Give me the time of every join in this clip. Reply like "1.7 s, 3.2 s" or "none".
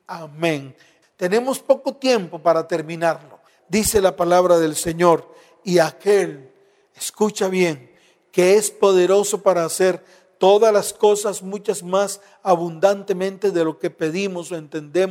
1.0 s, 3.6 s